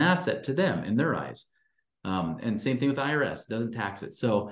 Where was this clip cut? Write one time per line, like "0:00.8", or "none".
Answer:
none